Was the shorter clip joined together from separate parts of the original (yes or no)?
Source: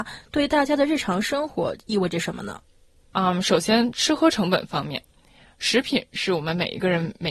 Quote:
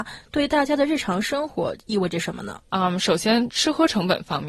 yes